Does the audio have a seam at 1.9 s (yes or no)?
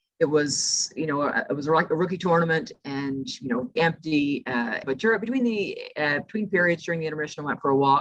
no